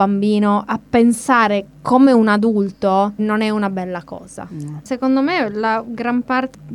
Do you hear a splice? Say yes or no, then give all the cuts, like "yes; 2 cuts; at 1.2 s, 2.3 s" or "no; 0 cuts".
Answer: yes; 1 cut; at 3.2 s